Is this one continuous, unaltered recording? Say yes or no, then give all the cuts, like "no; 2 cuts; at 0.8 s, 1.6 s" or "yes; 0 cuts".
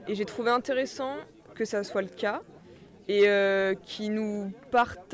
yes; 0 cuts